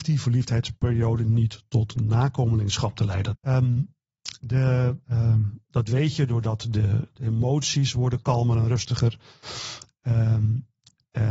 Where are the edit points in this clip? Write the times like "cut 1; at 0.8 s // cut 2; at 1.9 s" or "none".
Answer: cut 1; at 3.3 s // cut 2; at 5.0 s // cut 3; at 7.2 s